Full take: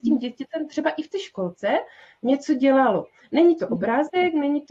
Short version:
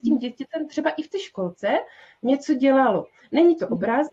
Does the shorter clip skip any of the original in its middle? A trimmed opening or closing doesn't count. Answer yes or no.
no